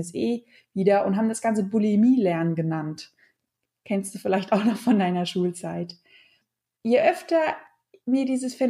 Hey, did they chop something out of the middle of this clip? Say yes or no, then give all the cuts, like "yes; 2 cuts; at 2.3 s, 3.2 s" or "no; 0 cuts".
no; 0 cuts